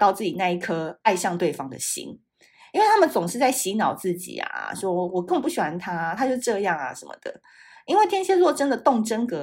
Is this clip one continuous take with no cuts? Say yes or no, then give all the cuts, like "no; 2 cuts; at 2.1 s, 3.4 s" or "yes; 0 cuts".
yes; 0 cuts